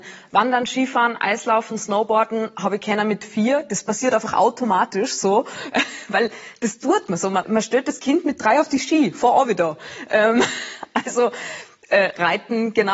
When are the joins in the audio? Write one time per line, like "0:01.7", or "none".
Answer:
0:07.4